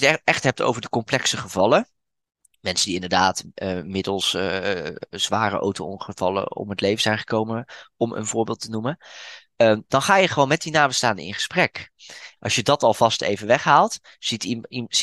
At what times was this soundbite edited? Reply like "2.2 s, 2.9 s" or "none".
12.4 s